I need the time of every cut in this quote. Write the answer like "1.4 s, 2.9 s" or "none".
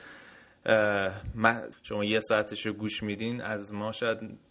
1.7 s